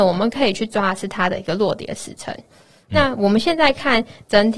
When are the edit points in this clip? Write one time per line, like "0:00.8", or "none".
none